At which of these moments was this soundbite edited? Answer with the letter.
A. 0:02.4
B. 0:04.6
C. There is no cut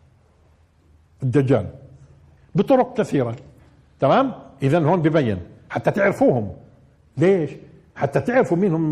A